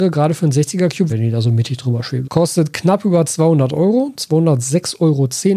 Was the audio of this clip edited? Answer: yes; 2 cuts; at 1.1 s, 2.2 s

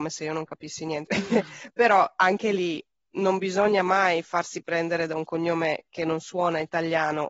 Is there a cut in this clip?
yes; 1 cut; at 1.1 s

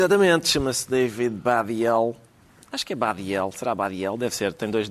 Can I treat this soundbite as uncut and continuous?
yes; 0 cuts

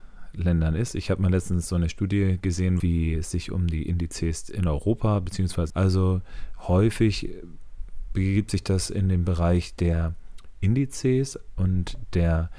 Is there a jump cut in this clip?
yes; 2 cuts; at 2.8 s, 5.7 s

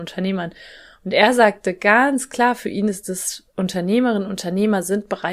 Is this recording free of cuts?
yes; 0 cuts

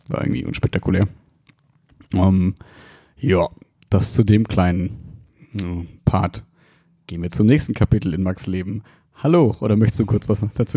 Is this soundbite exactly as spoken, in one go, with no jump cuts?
yes; 0 cuts

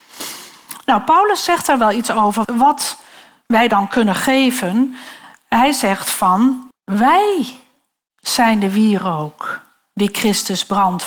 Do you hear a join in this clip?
yes; 2 cuts; at 2.4 s, 6.7 s

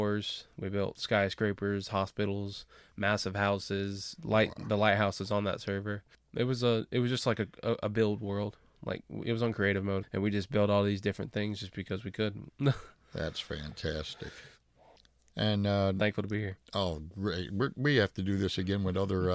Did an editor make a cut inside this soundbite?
yes; 3 cuts; at 10.0 s, 12.5 s, 15.3 s

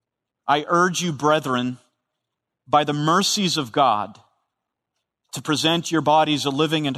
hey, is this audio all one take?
yes; 0 cuts

